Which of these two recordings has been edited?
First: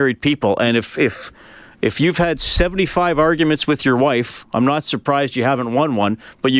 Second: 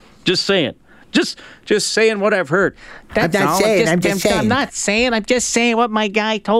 second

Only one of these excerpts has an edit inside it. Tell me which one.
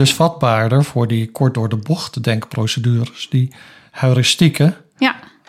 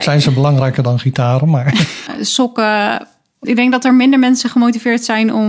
second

